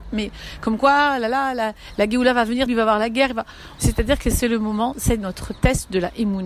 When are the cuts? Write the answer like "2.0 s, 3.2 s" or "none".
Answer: 2.7 s, 3.8 s